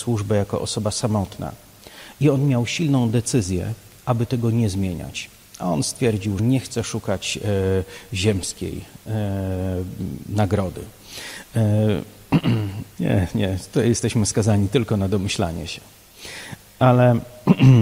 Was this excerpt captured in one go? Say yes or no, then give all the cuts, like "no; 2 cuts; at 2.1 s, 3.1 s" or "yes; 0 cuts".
no; 2 cuts; at 6.4 s, 12.9 s